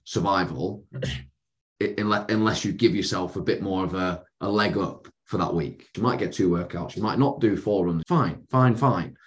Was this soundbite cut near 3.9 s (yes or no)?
no